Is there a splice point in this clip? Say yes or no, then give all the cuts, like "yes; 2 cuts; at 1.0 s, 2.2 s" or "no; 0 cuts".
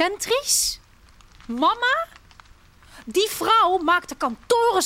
no; 0 cuts